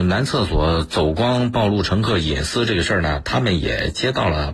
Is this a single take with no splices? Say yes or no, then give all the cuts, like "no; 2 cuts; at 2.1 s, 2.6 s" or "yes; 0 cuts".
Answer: yes; 0 cuts